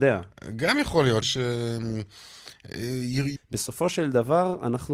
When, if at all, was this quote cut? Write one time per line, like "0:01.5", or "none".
0:01.2
0:03.4